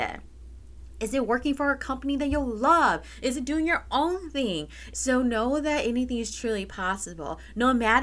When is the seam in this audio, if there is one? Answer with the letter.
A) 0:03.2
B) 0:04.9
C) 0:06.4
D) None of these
B